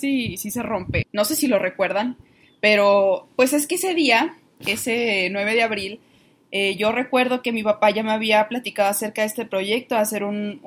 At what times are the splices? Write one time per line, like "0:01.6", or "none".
0:01.0